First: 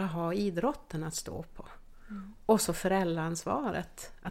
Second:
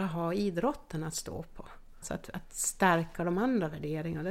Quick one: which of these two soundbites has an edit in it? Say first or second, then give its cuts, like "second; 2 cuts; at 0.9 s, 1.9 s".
second; 1 cut; at 2.0 s